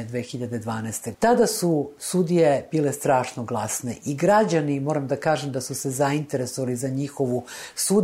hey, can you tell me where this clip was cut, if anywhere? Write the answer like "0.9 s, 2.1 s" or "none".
1.1 s